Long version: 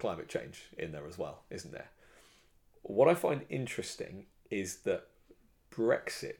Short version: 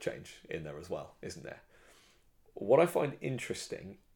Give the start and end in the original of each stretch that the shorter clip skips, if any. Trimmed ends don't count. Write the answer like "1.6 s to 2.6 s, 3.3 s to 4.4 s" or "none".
none